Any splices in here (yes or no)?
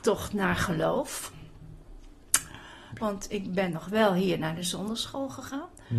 yes